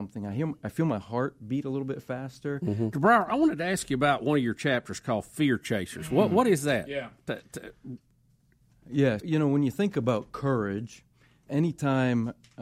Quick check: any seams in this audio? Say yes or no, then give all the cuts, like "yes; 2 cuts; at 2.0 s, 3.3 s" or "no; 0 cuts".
yes; 3 cuts; at 2.9 s, 9.2 s, 11.5 s